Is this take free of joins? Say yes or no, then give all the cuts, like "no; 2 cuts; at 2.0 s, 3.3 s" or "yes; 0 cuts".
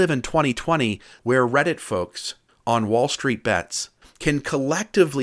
no; 1 cut; at 1.2 s